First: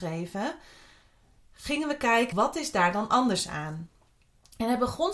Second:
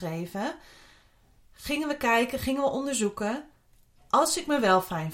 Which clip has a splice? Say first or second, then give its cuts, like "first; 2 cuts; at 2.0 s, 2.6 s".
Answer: first; 1 cut; at 2.3 s